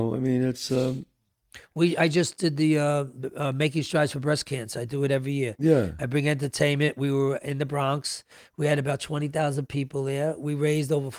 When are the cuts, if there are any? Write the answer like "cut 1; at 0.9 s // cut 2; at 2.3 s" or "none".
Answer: none